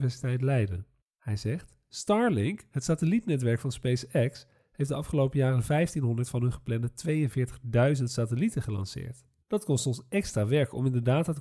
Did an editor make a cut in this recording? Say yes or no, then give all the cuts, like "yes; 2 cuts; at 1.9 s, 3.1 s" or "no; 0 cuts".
yes; 2 cuts; at 1.0 s, 9.4 s